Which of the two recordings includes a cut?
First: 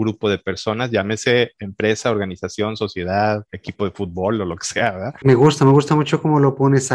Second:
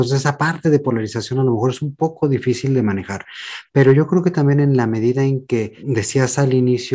first; 1 cut; at 5.2 s

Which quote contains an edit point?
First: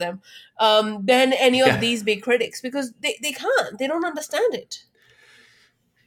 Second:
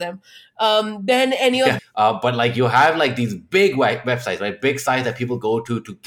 second; 1 cut; at 1.8 s

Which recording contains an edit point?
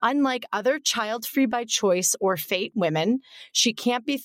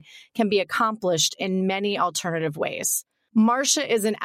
second; 1 cut; at 3.3 s

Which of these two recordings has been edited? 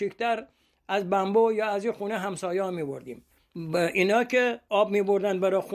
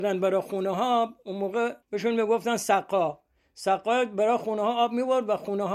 second; 1 cut; at 1.8 s

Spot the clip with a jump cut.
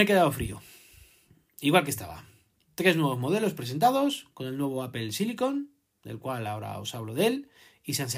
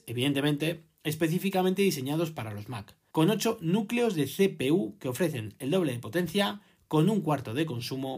second; 1 cut; at 3.1 s

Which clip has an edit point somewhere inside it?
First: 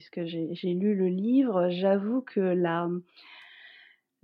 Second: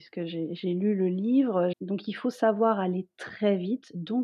second; 1 cut; at 1.7 s

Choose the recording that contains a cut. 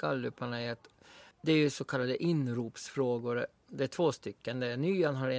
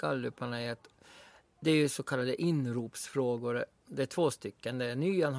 first; 1 cut; at 1.3 s

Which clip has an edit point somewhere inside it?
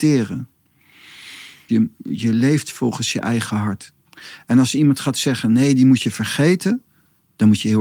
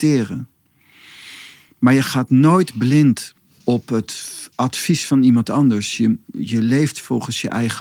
first; 1 cut; at 1.7 s

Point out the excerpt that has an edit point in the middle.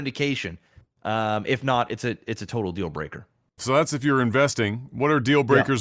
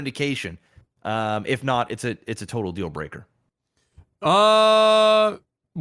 first; 1 cut; at 3.6 s

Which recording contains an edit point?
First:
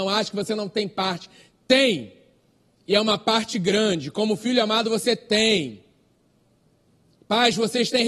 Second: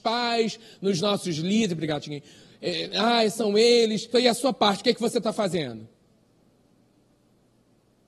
second; 1 cut; at 4.1 s

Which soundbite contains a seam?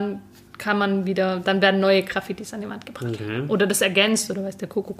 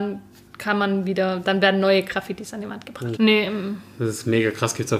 second; 1 cut; at 3.2 s

